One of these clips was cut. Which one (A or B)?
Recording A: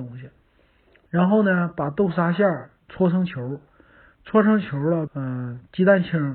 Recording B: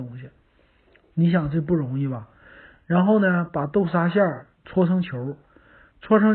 A